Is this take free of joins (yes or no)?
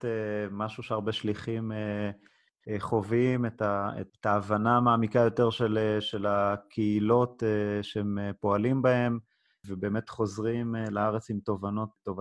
yes